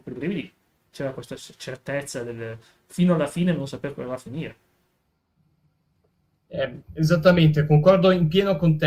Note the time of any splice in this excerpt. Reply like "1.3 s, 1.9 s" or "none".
none